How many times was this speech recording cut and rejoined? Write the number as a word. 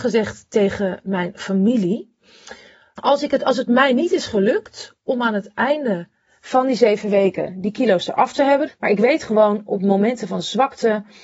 two